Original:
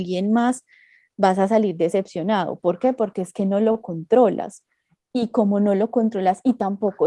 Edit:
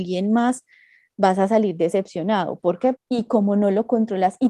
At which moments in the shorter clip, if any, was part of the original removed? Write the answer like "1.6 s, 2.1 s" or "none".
2.9 s